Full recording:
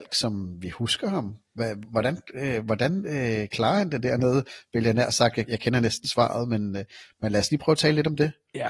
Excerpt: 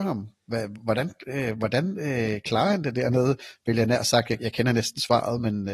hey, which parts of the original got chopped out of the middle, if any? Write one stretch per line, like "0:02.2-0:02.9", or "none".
none